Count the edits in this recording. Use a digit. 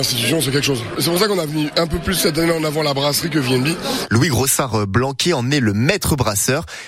1